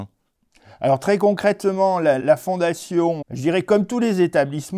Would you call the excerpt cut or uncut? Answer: cut